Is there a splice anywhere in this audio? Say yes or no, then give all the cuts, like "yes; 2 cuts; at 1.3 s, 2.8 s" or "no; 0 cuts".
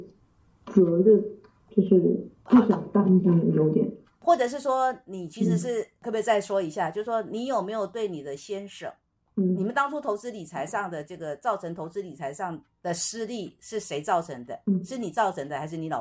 no; 0 cuts